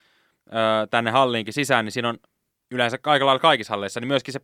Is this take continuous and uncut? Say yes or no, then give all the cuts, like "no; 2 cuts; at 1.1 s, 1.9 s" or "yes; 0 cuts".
yes; 0 cuts